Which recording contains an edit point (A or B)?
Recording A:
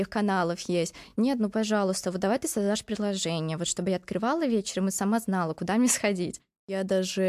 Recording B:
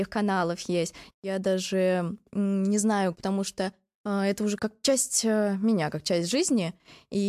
B